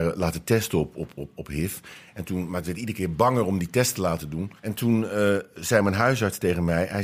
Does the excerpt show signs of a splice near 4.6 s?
yes; 1 cut; at 4.6 s

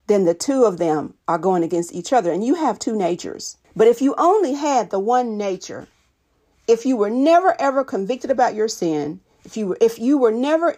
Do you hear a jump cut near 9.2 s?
no; 1 cut; at 3.6 s

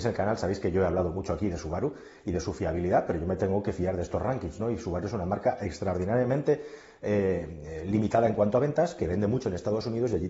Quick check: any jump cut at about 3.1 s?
no; 0 cuts

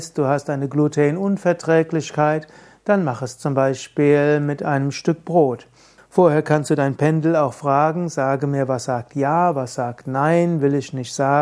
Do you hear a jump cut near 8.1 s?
no; 1 cut; at 6.0 s

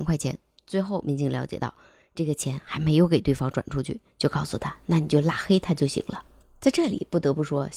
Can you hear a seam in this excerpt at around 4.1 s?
no; 0 cuts

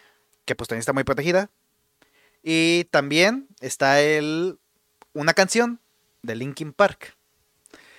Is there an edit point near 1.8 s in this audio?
no; 0 cuts

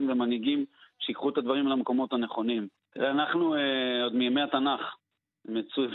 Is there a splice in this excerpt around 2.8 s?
yes; 1 cut; at 2.8 s

